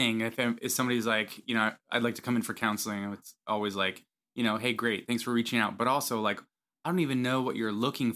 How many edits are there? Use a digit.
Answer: 0